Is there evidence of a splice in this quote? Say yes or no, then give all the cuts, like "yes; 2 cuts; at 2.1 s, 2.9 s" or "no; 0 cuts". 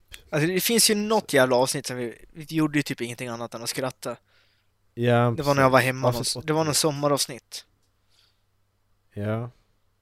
no; 0 cuts